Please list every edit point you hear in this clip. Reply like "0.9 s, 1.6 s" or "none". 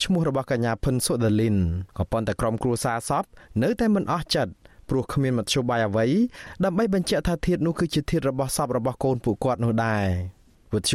1.9 s